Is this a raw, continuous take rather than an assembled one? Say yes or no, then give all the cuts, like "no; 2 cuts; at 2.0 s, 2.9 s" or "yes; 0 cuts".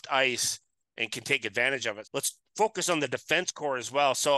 no; 1 cut; at 2.0 s